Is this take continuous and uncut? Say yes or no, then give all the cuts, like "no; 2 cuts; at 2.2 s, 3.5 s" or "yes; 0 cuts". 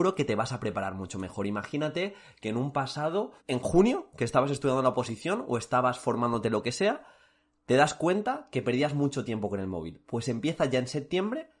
no; 1 cut; at 3.4 s